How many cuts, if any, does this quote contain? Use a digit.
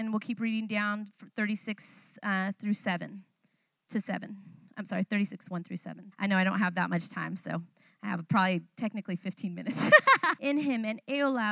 2